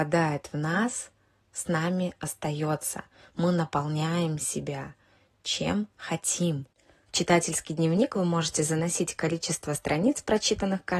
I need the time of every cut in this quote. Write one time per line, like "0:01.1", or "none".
0:07.0